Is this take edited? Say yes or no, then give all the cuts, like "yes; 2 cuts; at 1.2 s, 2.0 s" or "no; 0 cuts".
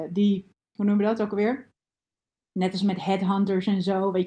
no; 0 cuts